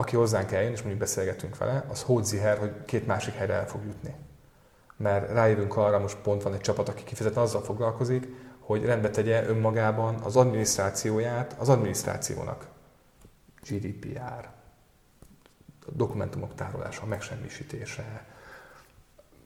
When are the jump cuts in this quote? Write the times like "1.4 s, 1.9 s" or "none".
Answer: none